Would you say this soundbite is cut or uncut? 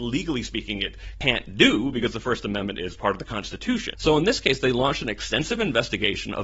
cut